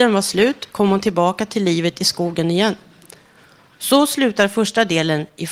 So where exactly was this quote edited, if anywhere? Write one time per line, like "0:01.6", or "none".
none